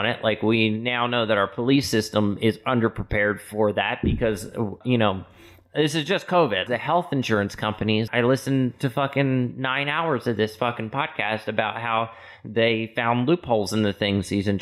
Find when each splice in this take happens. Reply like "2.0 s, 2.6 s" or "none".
4.8 s, 6.7 s, 8.1 s